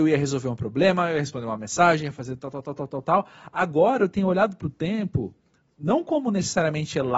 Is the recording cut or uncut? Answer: uncut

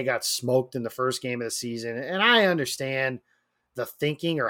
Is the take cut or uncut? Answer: uncut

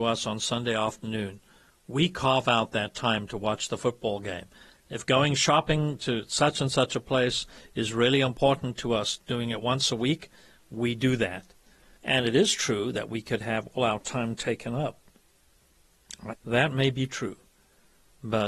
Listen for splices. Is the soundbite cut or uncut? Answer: cut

